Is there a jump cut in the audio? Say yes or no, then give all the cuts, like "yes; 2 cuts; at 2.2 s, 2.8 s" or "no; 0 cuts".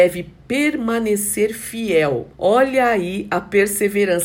yes; 1 cut; at 2.3 s